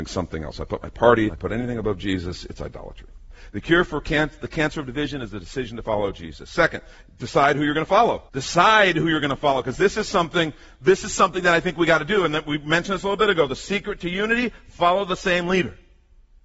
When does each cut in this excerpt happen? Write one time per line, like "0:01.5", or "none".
0:01.3
0:08.3